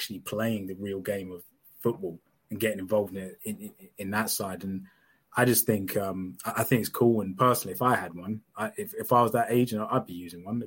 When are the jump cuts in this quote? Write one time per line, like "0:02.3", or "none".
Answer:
none